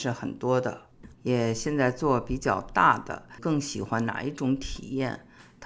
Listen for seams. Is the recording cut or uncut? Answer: cut